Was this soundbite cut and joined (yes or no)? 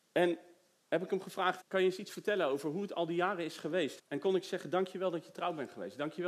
yes